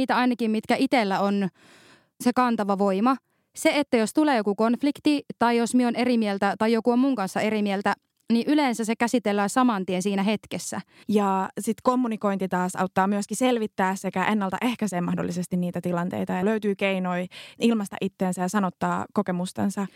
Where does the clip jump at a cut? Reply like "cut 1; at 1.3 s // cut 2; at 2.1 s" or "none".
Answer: cut 1; at 11.0 s // cut 2; at 16.4 s